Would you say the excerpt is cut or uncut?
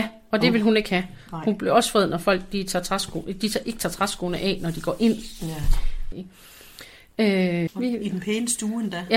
cut